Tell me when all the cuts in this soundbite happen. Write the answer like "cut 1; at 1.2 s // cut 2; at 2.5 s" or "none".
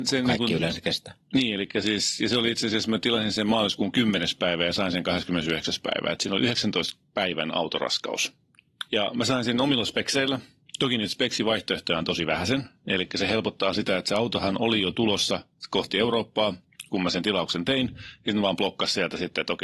cut 1; at 8.9 s